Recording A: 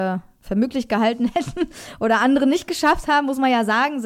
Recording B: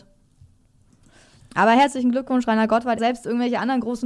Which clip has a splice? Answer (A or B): B